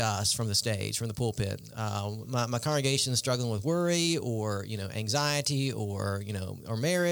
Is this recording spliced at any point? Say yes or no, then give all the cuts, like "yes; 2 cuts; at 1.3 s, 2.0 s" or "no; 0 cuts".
yes; 1 cut; at 2.2 s